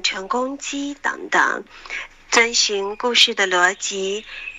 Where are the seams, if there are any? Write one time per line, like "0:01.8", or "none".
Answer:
0:02.3